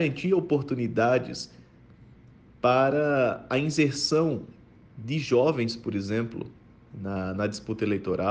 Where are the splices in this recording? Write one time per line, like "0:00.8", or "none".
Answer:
none